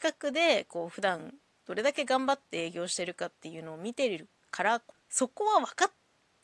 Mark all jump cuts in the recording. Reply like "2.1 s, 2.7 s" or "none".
4.9 s